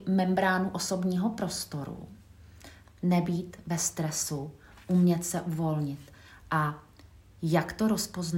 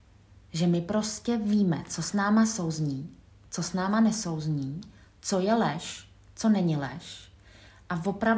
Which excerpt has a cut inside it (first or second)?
first